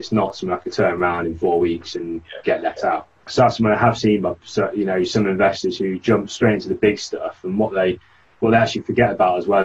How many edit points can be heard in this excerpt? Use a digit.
0